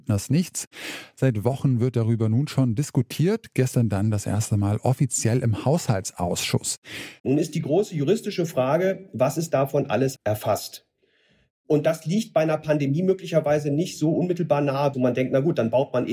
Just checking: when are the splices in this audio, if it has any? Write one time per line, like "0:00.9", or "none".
0:07.2
0:10.2
0:14.9